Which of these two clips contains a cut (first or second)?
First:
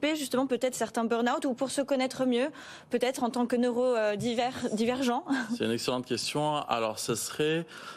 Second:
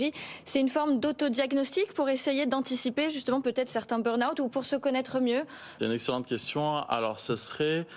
second